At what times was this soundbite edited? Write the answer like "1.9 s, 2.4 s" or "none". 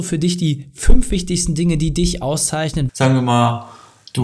2.9 s